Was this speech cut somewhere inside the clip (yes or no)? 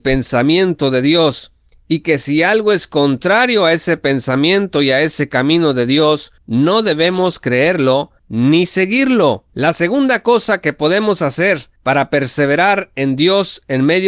yes